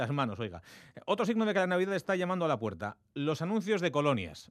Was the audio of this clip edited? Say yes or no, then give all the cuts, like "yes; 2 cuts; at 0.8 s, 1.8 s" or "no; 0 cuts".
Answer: no; 0 cuts